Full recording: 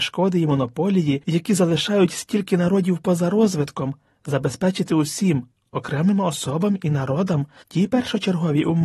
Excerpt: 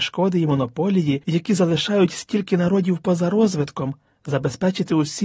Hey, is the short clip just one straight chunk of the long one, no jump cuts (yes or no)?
yes